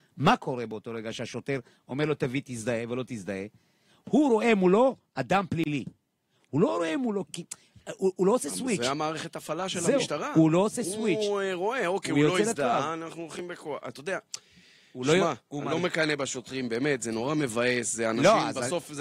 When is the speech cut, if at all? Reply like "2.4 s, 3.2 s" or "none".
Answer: 7.3 s